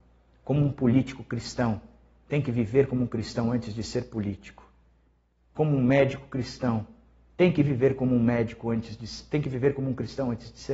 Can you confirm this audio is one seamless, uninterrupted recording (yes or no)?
yes